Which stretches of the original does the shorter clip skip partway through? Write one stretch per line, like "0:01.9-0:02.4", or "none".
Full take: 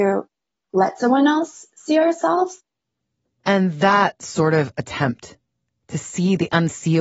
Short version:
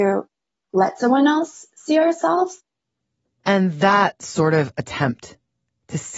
none